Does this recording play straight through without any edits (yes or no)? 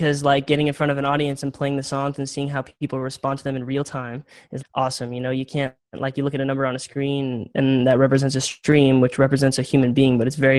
no